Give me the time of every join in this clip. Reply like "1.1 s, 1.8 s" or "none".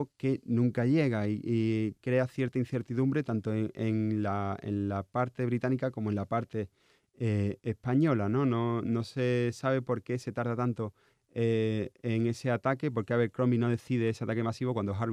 none